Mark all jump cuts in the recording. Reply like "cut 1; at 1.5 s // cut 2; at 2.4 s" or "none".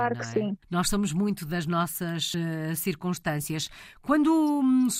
none

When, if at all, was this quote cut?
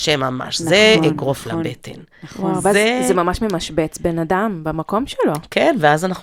none

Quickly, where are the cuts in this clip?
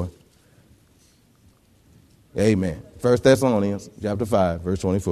none

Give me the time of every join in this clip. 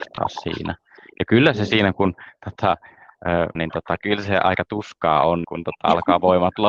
cut 1; at 3.6 s // cut 2; at 5.4 s

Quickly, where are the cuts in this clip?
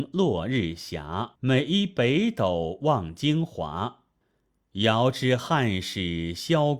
cut 1; at 1.3 s

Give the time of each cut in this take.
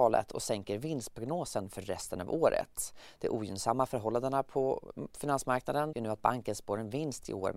cut 1; at 5.9 s

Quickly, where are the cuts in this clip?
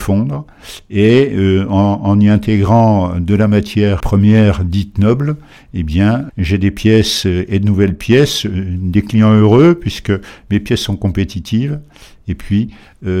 cut 1; at 4.0 s // cut 2; at 6.3 s

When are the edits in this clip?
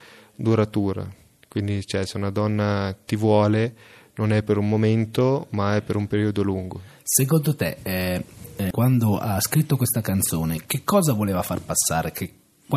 cut 1; at 8.7 s

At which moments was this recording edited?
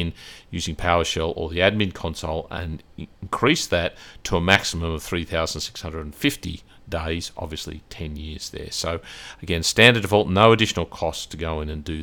none

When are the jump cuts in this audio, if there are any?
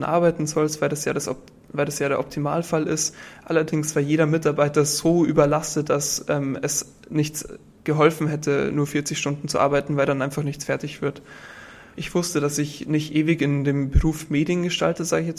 cut 1; at 11.9 s

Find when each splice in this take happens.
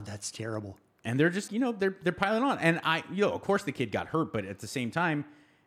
cut 1; at 1.5 s

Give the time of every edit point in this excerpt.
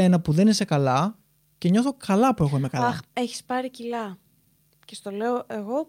none

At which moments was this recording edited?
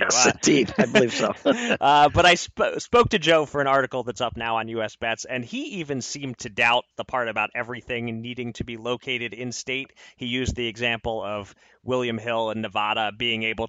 none

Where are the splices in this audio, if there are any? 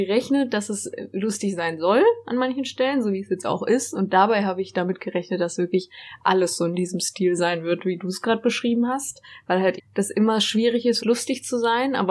cut 1; at 9.8 s // cut 2; at 11.0 s

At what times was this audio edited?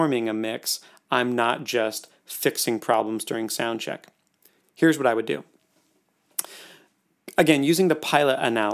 none

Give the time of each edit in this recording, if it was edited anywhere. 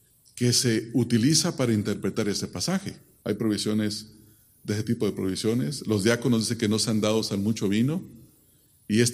cut 1; at 3.2 s

